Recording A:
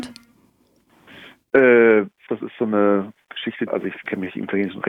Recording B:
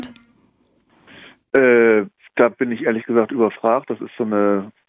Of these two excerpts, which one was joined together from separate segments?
A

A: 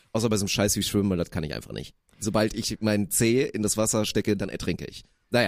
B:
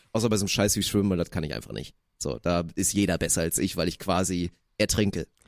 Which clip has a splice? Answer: A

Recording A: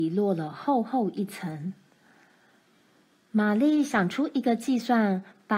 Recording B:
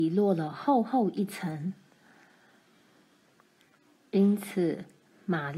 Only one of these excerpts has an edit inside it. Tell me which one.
B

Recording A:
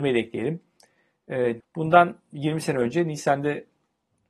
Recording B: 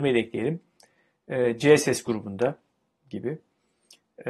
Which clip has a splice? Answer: A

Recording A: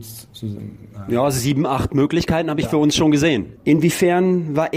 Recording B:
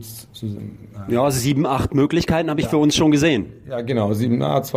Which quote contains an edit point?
A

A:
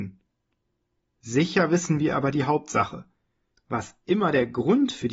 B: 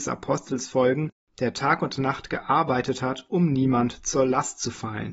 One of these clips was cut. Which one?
A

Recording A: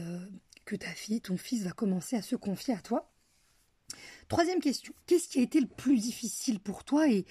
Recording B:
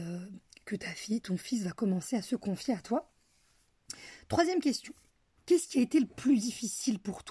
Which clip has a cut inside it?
A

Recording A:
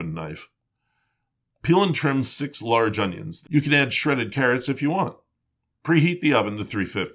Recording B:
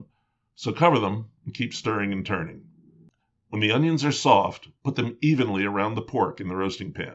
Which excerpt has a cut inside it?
A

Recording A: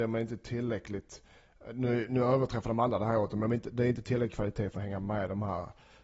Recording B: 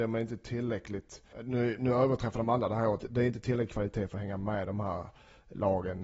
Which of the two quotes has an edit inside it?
B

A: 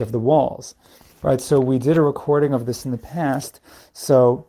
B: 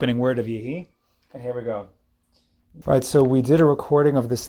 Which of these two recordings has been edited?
B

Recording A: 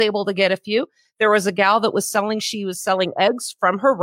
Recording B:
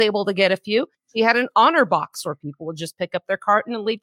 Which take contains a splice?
B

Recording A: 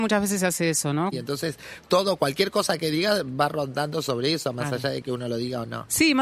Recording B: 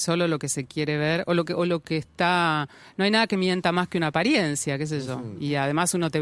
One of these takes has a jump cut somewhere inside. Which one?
A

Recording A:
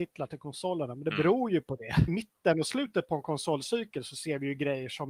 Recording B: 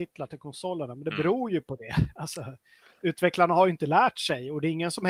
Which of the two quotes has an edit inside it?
A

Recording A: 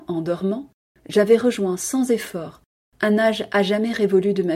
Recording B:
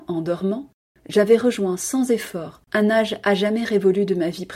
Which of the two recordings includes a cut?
B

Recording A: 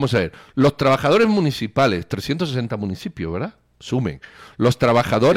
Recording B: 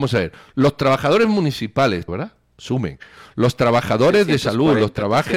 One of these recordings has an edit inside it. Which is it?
B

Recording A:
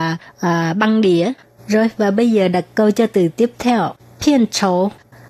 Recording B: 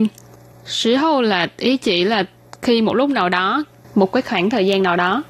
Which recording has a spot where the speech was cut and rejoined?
A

